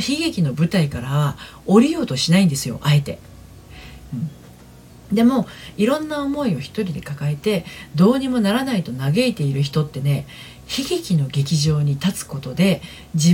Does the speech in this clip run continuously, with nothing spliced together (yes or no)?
no